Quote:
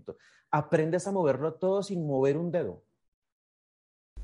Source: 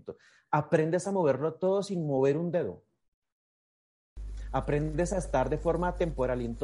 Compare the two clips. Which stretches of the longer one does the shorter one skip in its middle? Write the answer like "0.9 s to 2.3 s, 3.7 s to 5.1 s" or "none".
none